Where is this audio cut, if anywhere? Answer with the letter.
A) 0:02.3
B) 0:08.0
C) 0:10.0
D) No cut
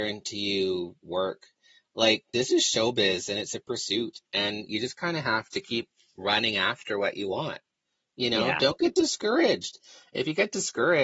A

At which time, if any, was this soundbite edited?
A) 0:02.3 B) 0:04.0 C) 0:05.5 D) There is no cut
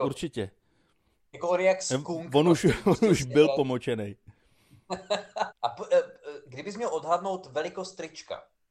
C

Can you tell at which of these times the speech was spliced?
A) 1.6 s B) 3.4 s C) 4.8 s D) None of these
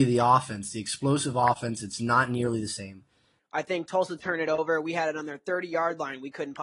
B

